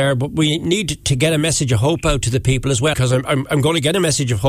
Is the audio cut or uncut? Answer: cut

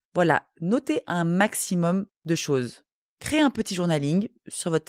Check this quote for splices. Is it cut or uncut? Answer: cut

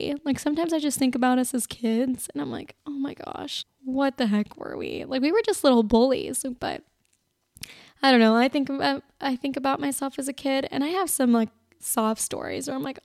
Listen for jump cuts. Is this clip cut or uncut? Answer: cut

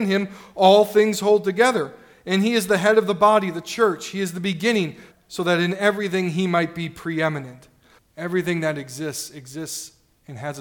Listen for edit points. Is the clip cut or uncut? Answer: cut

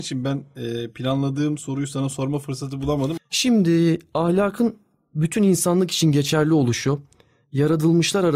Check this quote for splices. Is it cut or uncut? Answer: cut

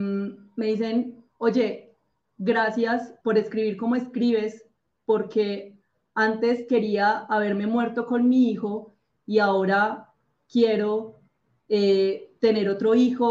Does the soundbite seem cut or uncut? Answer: cut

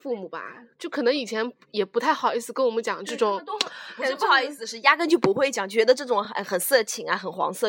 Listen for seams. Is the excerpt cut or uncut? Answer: uncut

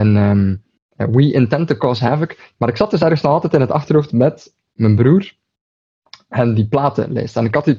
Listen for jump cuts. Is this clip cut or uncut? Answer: cut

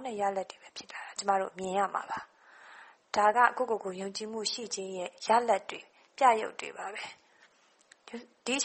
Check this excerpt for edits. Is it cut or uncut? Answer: uncut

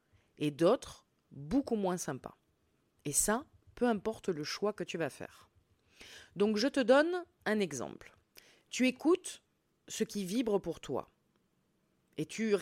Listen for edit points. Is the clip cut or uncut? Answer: uncut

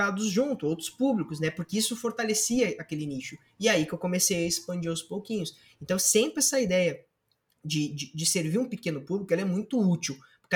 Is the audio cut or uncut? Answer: uncut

